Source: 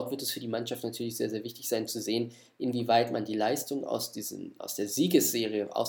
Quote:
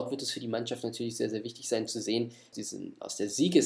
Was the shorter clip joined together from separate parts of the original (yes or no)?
yes